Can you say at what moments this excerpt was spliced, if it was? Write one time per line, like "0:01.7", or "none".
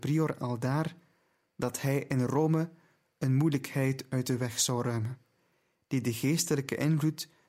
none